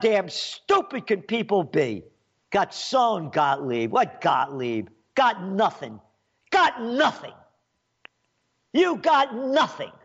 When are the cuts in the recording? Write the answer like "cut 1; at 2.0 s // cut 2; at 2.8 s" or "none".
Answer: cut 1; at 2.4 s